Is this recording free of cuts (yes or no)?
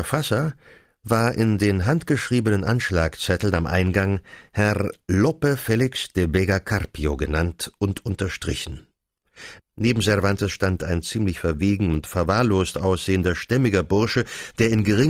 no